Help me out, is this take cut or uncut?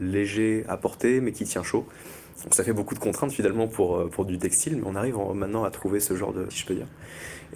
cut